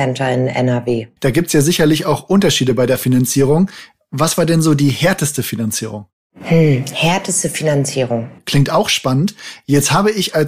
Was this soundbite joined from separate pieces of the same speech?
yes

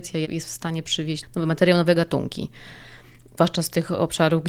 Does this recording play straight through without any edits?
no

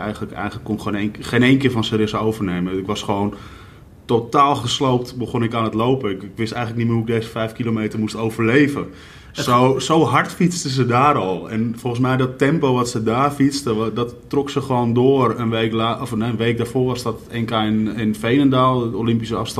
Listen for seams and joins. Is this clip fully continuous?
yes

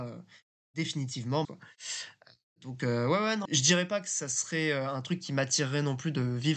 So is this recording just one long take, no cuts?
no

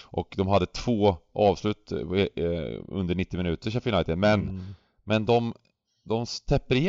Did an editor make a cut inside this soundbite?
no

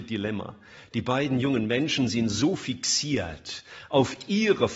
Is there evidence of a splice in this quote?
no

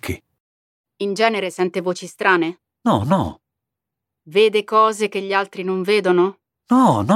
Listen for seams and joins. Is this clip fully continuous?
no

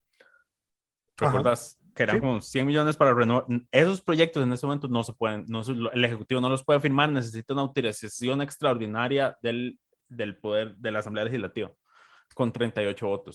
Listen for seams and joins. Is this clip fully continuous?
yes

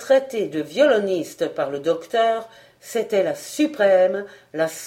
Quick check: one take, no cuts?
yes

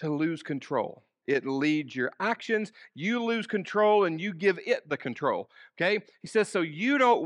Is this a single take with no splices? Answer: no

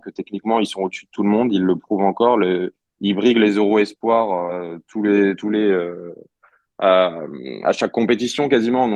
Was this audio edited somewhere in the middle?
no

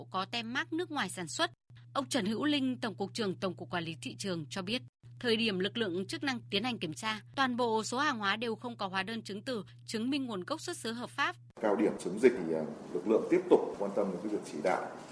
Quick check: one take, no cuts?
yes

